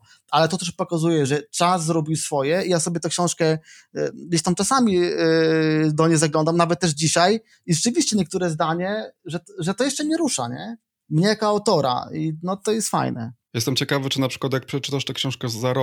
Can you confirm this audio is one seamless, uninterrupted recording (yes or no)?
yes